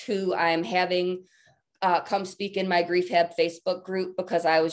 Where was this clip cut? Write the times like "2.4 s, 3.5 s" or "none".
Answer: none